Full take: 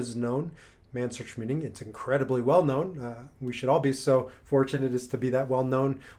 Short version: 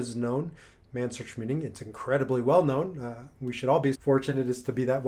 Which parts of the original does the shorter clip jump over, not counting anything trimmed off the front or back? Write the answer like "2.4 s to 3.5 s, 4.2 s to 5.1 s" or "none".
3.9 s to 4.4 s